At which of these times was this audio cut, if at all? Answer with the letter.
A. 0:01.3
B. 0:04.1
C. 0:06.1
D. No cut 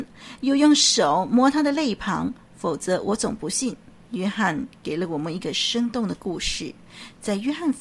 B